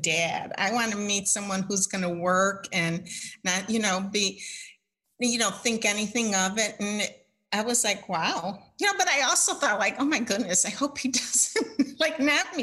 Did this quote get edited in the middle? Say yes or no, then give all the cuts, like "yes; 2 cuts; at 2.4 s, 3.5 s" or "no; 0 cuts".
no; 0 cuts